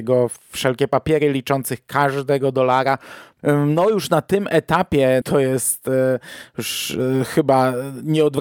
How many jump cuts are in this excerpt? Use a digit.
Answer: 2